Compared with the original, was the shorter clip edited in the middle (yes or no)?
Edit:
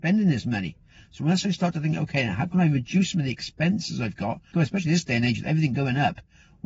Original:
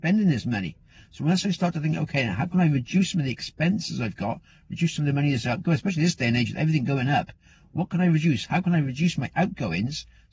yes